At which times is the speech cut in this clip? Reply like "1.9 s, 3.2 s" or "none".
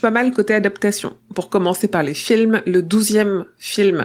none